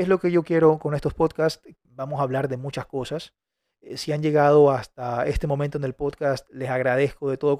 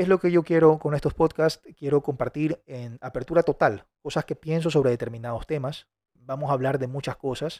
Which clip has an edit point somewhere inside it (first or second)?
first